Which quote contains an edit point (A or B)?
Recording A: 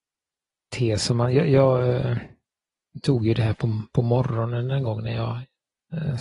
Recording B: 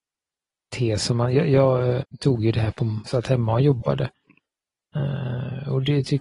B